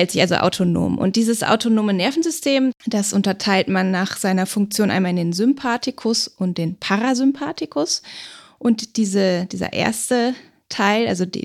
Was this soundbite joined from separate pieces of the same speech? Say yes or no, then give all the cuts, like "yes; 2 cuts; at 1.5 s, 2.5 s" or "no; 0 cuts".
no; 0 cuts